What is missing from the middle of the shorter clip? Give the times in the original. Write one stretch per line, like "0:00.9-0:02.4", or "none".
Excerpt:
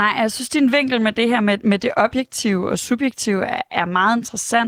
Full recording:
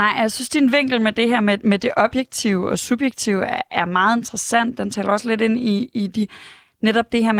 none